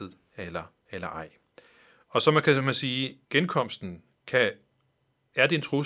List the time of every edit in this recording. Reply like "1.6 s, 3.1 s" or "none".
3.2 s